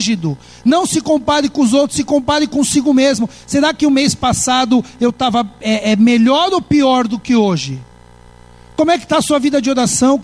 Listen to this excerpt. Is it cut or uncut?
uncut